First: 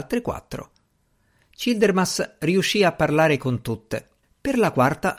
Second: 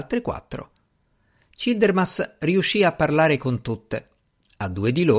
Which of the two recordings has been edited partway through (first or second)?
first